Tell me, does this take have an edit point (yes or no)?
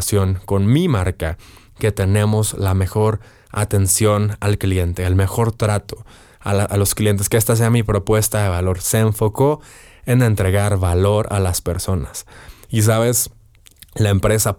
no